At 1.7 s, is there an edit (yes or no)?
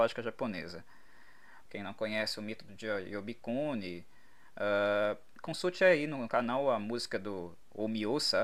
yes